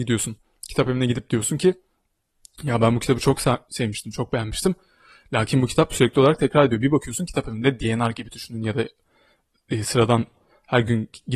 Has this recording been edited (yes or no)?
no